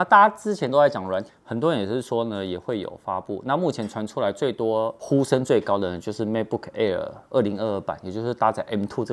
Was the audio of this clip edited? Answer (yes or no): yes